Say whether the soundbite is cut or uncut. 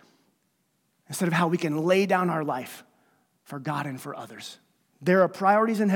cut